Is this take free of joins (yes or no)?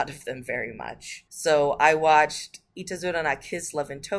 no